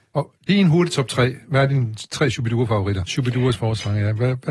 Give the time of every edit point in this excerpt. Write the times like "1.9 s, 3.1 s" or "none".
3.1 s